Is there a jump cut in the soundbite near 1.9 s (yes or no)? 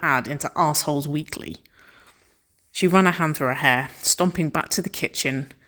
no